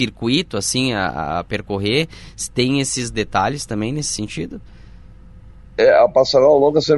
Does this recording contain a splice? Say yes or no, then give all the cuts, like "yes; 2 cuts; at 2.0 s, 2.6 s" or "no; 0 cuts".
no; 0 cuts